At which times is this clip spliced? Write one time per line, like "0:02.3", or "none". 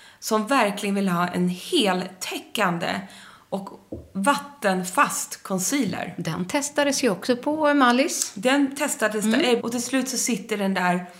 0:09.6